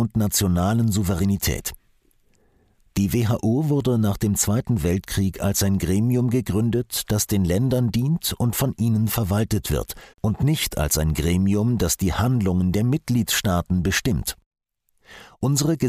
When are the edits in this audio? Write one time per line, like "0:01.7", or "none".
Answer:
0:10.1